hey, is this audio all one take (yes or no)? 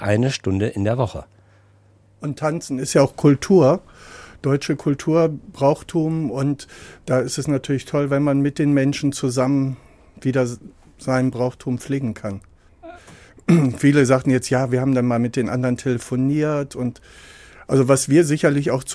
no